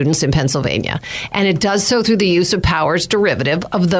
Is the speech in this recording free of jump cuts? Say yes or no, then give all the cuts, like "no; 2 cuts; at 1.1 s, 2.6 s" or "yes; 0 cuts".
yes; 0 cuts